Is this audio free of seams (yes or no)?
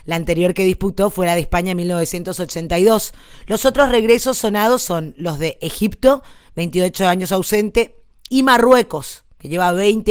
no